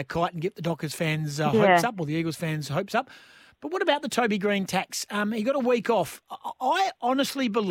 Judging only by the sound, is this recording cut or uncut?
uncut